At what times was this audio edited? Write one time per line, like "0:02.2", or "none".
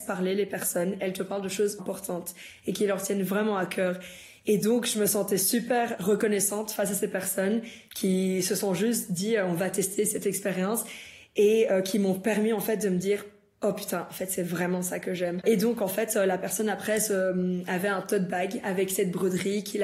0:01.8
0:15.4